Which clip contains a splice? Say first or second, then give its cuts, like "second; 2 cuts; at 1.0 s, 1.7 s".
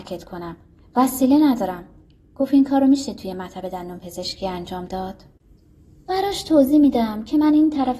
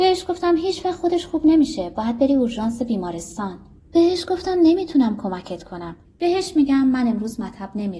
second; 2 cuts; at 3.8 s, 6.0 s